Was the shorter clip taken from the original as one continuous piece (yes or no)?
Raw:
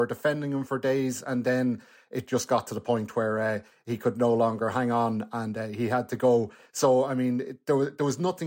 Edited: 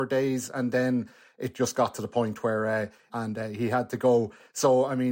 no